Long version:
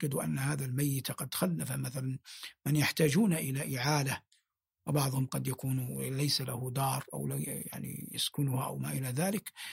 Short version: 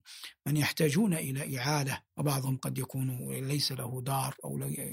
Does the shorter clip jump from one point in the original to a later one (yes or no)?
yes